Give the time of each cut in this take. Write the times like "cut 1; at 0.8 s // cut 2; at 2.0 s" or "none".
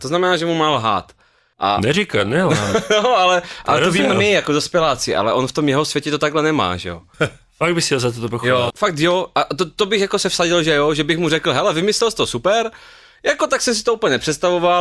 cut 1; at 7.1 s // cut 2; at 8.7 s

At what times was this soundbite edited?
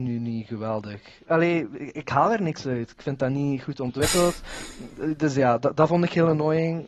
cut 1; at 1.3 s

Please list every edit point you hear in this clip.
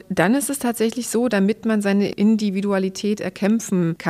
cut 1; at 1.3 s

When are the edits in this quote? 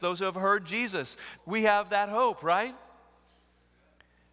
cut 1; at 1.4 s

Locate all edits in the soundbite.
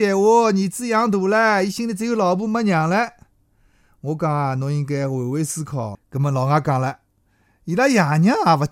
cut 1; at 5.9 s

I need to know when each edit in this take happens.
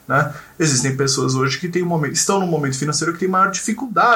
none

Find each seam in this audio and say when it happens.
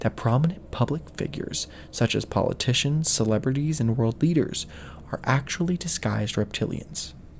none

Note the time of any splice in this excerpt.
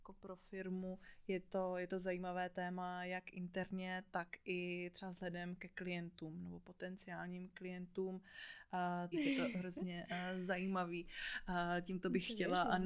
cut 1; at 9.1 s

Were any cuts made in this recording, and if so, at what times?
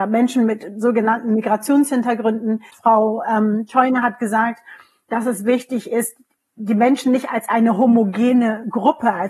cut 1; at 2.7 s

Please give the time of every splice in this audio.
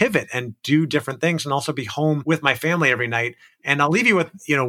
none

